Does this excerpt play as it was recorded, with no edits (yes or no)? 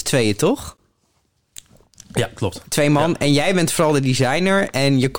yes